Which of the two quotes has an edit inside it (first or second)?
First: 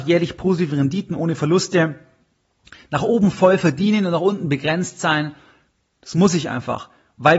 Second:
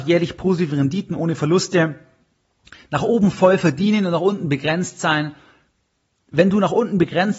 first